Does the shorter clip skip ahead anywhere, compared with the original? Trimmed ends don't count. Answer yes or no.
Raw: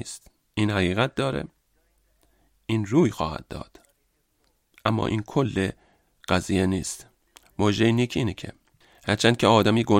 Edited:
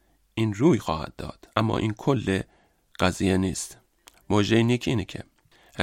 yes